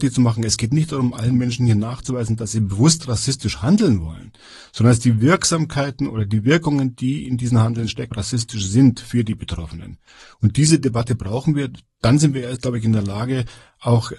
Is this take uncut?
no; 1 cut; at 8.1 s

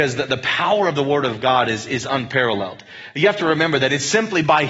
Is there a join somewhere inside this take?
no; 0 cuts

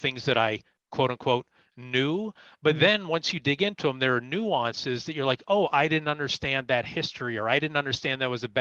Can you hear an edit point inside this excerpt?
no; 0 cuts

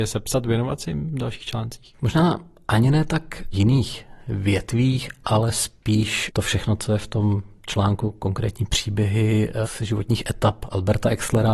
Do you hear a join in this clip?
no; 0 cuts

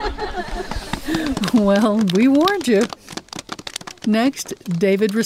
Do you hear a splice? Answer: no; 0 cuts

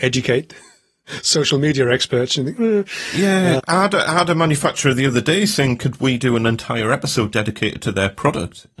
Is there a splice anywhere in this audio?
yes; 2 cuts; at 3.6 s, 7.3 s

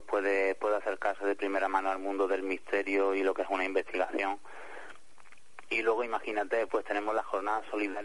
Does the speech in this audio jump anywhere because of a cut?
yes; 1 cut; at 6.7 s

